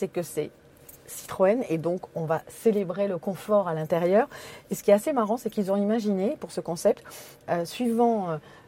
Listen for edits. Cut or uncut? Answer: uncut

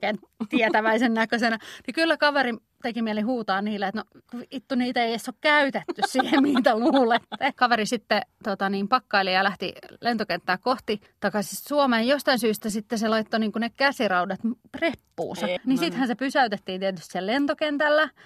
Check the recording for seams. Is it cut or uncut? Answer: cut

